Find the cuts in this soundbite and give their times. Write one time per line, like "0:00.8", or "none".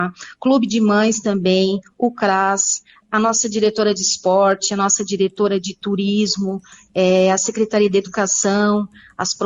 none